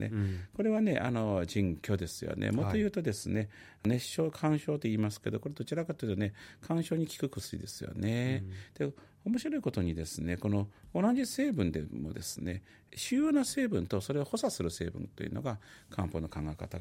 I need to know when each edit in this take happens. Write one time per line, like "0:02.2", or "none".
none